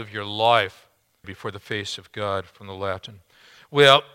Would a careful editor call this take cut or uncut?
cut